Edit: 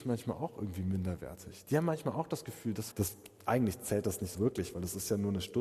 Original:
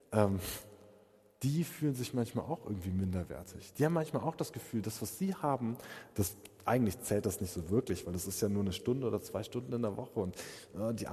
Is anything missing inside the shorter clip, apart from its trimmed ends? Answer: yes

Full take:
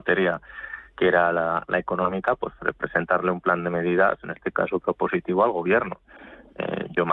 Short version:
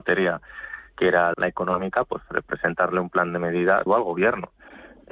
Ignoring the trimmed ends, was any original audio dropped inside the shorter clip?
yes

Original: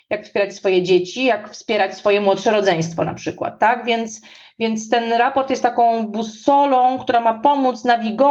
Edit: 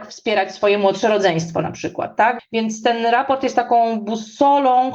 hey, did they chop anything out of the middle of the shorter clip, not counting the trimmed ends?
yes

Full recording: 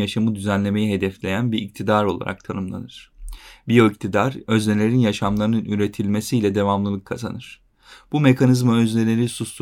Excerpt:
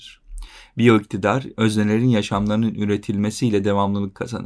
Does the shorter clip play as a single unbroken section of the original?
yes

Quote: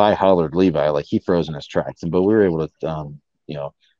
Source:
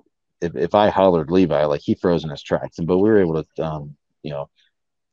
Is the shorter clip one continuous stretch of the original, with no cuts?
yes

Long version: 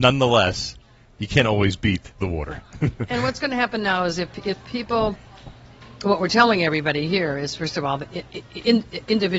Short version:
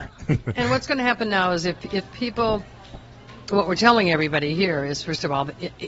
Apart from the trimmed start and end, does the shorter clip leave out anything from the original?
no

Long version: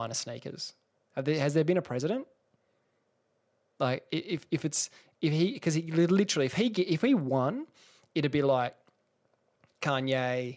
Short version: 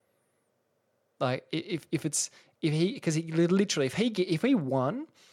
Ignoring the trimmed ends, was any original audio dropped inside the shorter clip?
no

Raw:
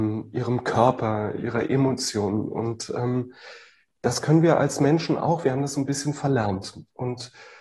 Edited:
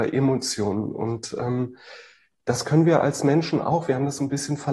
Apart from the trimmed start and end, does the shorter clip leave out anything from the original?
no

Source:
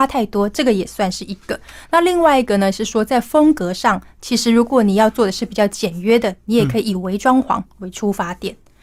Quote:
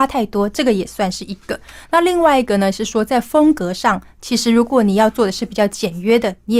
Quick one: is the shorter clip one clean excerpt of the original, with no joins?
yes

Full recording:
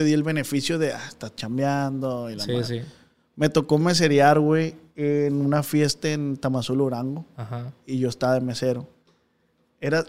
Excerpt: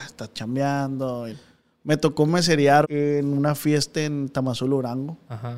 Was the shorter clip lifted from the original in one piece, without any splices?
no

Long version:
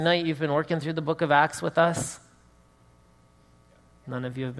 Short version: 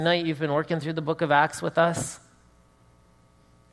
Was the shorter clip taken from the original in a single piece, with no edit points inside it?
yes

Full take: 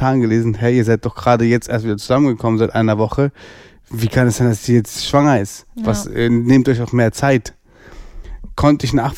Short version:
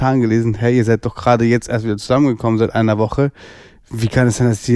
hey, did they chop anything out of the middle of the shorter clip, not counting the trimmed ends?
no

